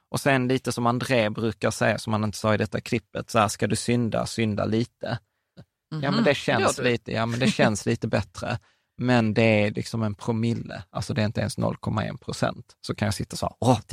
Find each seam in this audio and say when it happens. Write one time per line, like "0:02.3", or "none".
0:05.6